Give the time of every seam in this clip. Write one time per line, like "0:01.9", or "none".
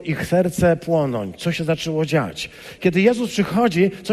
0:02.8